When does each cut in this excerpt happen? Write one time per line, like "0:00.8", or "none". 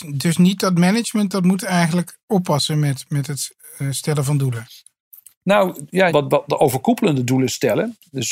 0:06.1